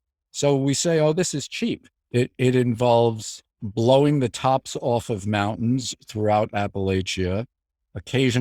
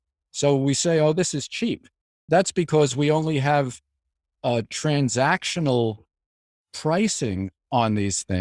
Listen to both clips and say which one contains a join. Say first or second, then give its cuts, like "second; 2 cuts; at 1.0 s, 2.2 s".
first; 2 cuts; at 2.0 s, 3.5 s